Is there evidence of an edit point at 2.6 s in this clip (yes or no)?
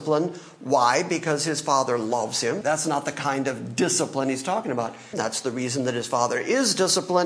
yes